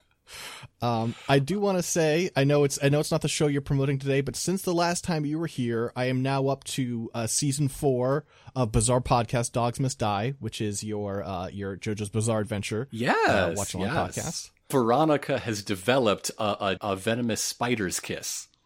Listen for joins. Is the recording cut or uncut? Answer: cut